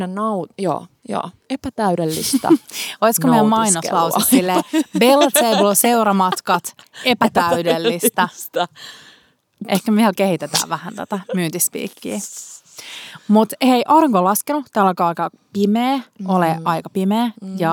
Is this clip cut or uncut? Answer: uncut